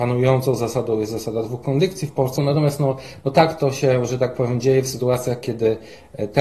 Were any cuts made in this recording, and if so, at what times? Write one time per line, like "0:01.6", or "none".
0:02.4